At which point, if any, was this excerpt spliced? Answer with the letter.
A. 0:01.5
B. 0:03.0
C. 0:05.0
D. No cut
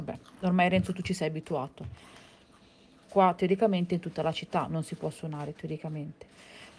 B